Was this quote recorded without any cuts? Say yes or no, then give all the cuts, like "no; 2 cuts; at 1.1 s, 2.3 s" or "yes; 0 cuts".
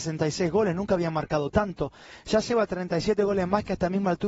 yes; 0 cuts